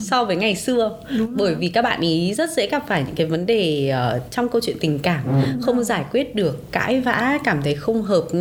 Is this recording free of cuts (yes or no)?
yes